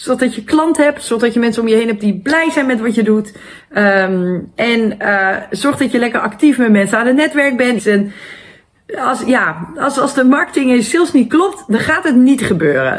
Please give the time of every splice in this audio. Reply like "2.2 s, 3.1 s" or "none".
7.8 s